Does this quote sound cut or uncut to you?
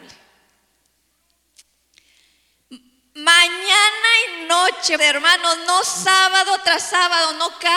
cut